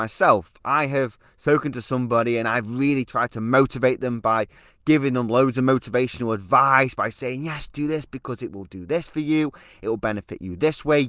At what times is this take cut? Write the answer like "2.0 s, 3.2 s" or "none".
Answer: none